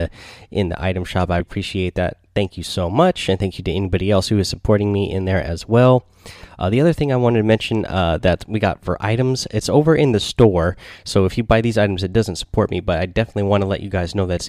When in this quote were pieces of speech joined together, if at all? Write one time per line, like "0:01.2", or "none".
0:01.4